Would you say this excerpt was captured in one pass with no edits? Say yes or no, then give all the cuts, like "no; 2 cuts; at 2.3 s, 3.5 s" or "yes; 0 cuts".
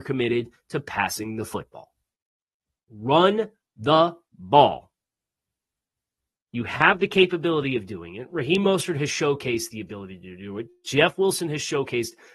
yes; 0 cuts